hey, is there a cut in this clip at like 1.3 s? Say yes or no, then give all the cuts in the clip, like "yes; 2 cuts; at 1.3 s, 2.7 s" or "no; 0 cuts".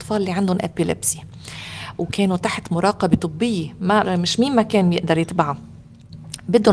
no; 1 cut; at 4.0 s